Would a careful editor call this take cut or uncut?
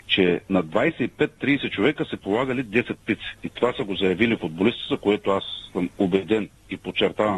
uncut